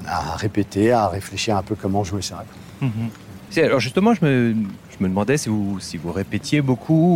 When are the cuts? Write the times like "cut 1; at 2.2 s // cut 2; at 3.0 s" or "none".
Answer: cut 1; at 3.5 s